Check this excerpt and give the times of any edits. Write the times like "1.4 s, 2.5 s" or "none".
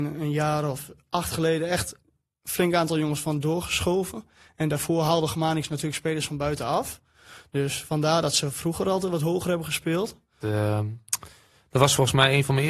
10.4 s